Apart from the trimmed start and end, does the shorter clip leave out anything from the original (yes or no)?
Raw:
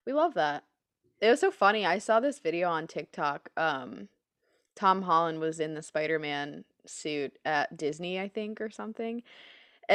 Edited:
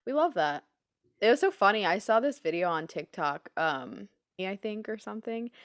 yes